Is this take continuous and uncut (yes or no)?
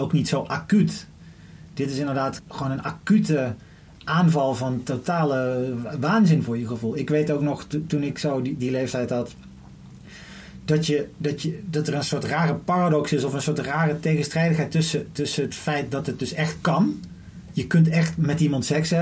no